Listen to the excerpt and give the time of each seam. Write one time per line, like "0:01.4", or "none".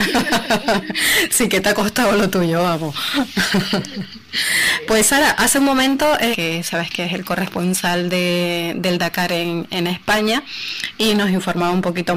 0:06.3